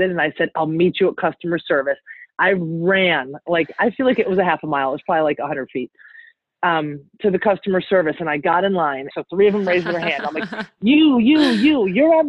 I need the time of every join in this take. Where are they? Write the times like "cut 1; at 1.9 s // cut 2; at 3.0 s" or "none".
cut 1; at 9.1 s